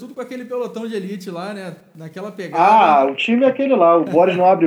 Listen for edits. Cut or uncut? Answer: uncut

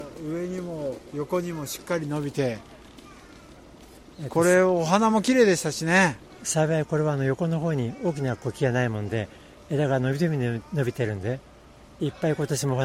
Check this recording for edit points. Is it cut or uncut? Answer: uncut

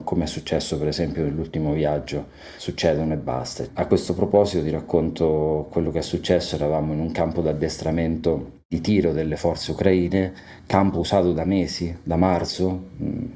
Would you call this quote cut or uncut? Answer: cut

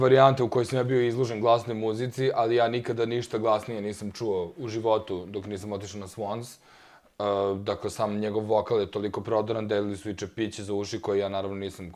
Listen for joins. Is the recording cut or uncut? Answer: uncut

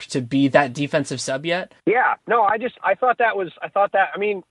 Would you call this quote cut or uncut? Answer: cut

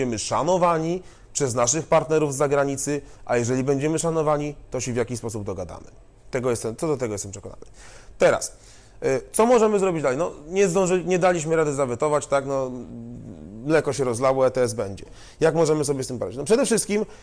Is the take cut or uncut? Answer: uncut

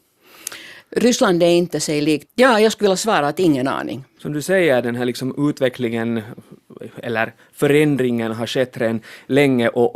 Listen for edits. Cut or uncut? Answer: cut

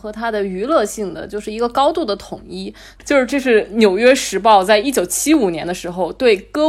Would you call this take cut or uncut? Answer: cut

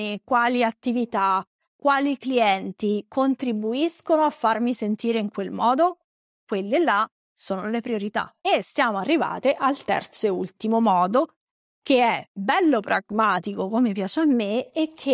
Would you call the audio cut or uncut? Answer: uncut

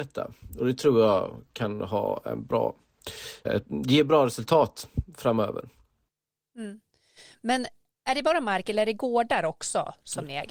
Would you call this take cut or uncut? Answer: cut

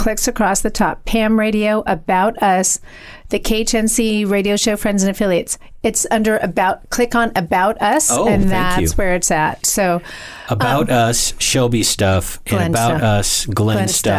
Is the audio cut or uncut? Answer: uncut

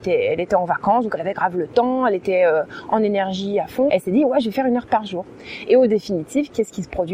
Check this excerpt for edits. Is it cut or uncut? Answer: cut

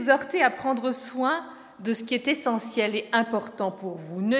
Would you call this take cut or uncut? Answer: uncut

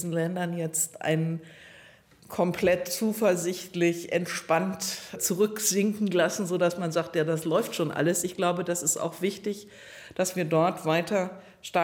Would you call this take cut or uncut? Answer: uncut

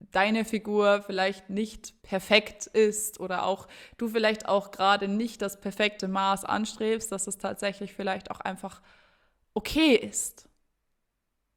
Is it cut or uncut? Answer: cut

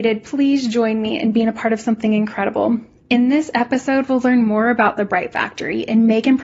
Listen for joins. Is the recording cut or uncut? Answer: cut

